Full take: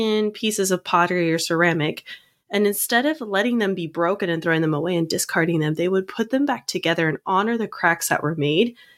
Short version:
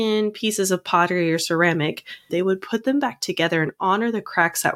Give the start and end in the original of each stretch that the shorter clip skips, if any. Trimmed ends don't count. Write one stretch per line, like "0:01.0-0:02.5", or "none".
0:02.3-0:05.8